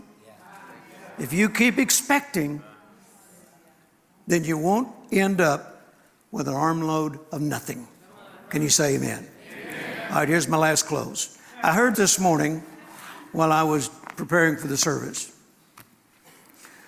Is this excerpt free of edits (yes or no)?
no